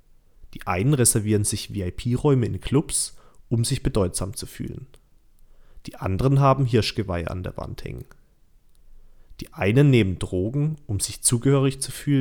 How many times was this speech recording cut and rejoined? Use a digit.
0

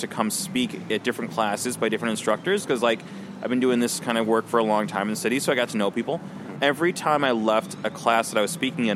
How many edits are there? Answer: 1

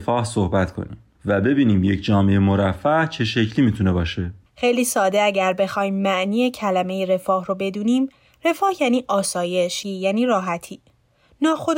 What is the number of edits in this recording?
1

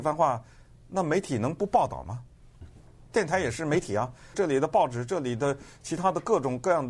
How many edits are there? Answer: 2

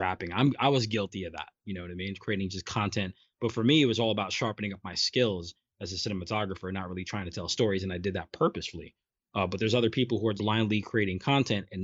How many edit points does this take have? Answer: 1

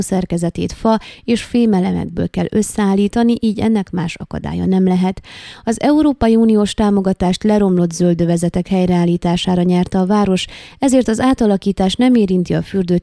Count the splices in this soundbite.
0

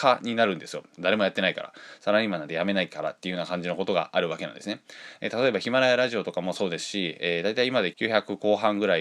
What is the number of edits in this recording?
1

